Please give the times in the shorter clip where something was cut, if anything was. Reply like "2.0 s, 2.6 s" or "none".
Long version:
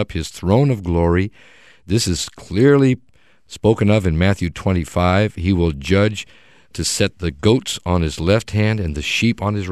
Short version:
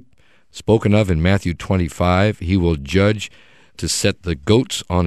none